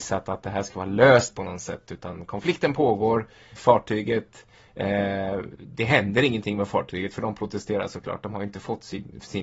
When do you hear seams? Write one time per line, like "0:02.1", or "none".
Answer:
0:01.9
0:03.6

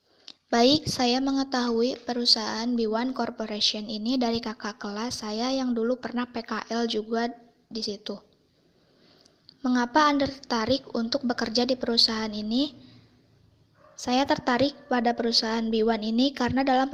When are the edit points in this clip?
none

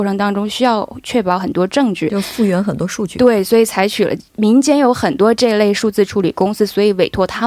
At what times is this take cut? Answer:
none

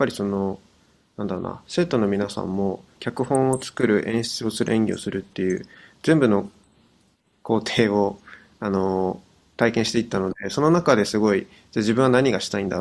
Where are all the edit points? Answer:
0:02.9

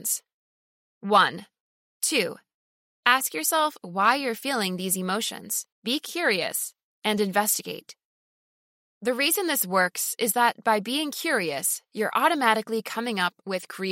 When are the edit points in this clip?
0:01.8
0:05.7

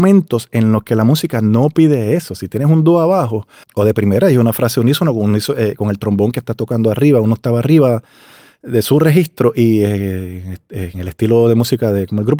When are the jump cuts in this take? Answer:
0:03.6

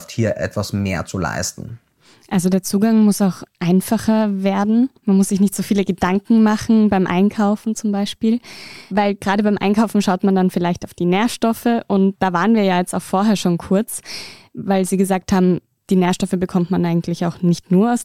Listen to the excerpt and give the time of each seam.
0:05.0

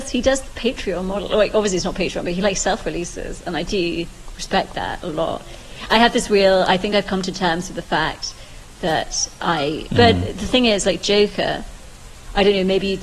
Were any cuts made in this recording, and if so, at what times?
0:09.9

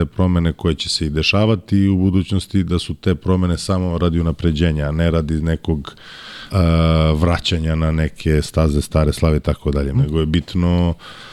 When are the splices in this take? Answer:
0:06.5
0:09.9

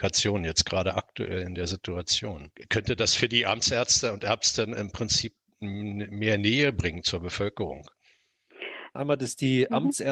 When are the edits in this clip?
0:08.9

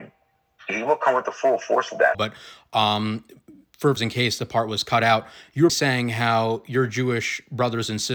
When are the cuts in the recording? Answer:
0:02.1
0:04.0
0:05.7

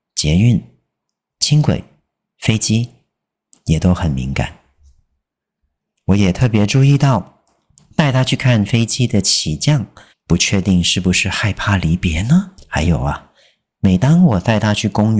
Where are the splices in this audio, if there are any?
0:10.1

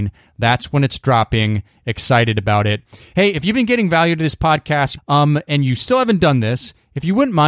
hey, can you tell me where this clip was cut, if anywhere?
0:05.0

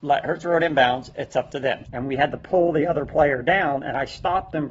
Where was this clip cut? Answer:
0:01.9

